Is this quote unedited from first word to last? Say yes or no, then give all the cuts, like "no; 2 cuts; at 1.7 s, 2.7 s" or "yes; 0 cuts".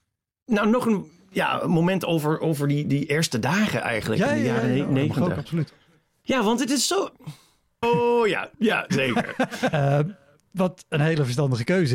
no; 2 cuts; at 7.8 s, 9.7 s